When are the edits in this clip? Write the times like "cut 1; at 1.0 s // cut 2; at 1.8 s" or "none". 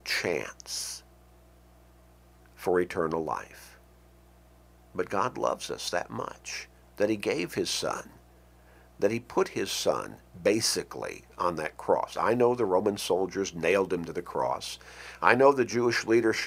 none